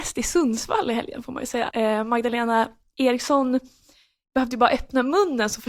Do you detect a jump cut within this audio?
yes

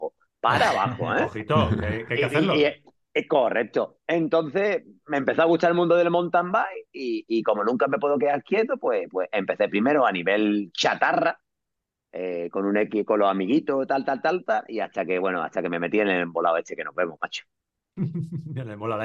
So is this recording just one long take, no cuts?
yes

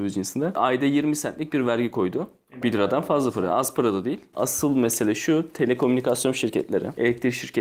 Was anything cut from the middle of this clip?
yes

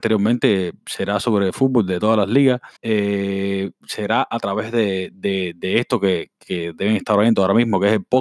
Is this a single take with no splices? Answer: no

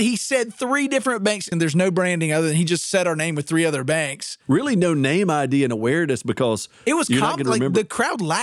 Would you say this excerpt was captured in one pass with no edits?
no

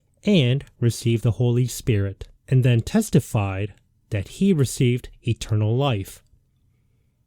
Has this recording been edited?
yes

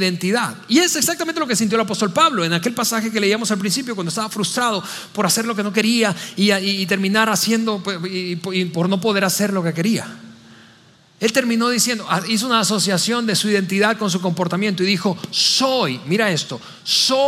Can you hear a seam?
no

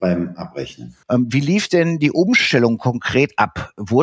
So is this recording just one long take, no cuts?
no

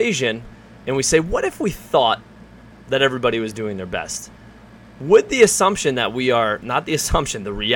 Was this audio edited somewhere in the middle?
no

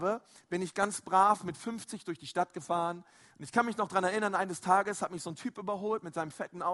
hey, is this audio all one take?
yes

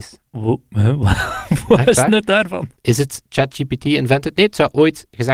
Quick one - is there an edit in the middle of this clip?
yes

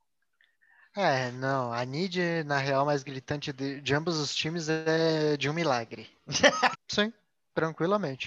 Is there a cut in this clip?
yes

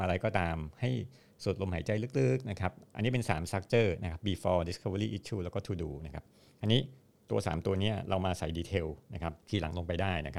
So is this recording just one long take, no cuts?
no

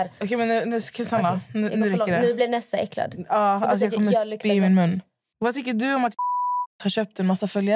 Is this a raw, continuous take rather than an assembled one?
yes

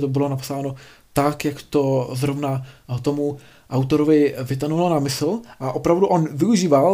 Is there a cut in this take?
no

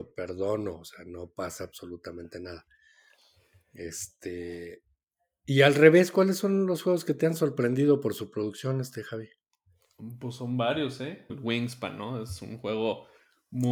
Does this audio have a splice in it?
yes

